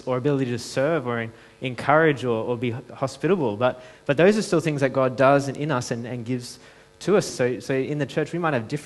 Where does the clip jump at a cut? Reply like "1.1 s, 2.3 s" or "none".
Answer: 7.3 s

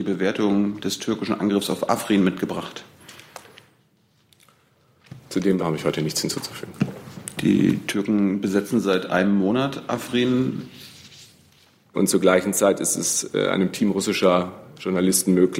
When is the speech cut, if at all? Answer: 5.6 s, 11.9 s

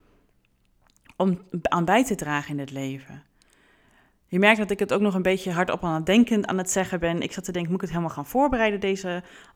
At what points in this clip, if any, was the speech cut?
none

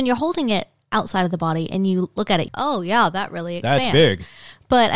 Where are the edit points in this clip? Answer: 2.5 s

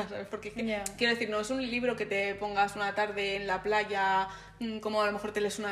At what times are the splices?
none

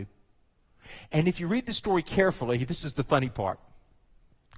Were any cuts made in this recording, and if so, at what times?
none

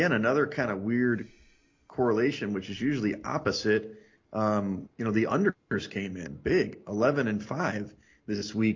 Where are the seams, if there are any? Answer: 4.9 s

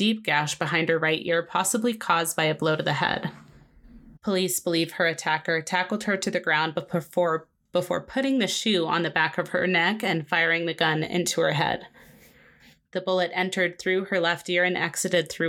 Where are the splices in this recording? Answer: 4.2 s

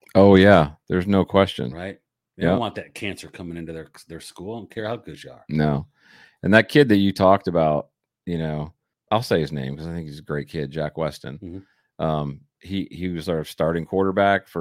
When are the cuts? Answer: 8.9 s

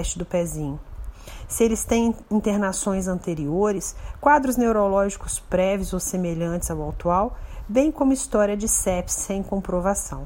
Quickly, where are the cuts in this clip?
none

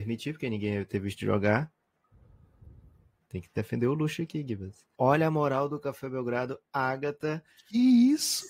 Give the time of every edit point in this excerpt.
4.9 s

